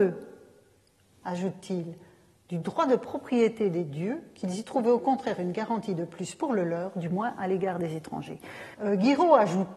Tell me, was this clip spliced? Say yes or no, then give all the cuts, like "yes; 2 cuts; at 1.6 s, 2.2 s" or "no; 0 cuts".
yes; 1 cut; at 8.7 s